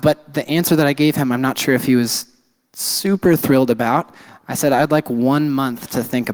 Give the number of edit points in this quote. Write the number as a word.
zero